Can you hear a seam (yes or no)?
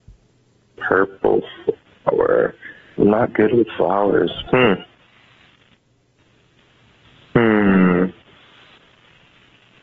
no